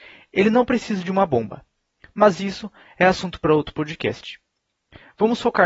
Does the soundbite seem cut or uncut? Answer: uncut